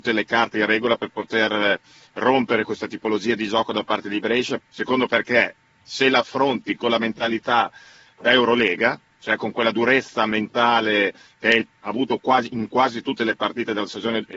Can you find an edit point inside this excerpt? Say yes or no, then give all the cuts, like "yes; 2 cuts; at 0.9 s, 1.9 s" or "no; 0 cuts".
yes; 1 cut; at 4.6 s